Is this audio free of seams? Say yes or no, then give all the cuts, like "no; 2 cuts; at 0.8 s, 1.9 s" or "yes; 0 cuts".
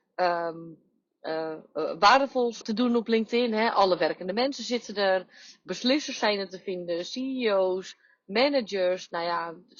no; 1 cut; at 2.6 s